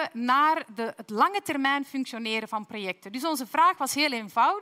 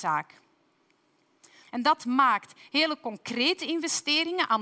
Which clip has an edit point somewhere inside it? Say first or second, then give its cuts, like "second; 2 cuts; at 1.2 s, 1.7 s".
second; 1 cut; at 1.6 s